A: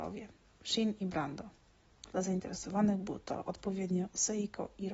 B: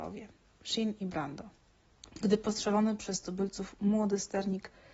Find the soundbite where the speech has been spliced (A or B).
B